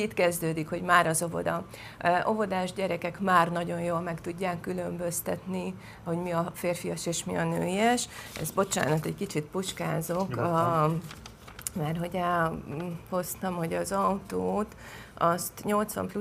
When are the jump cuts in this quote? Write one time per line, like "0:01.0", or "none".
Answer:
none